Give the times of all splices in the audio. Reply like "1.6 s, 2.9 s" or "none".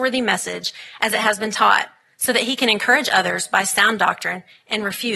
none